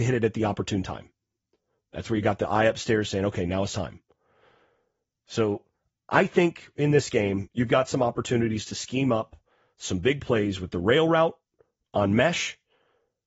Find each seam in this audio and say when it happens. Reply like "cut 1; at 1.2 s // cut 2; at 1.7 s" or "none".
none